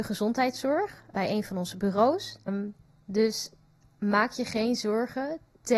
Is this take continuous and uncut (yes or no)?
no